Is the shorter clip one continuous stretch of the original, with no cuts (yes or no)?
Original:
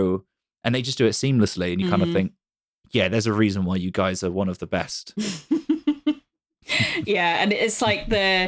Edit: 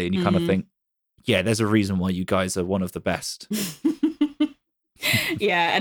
yes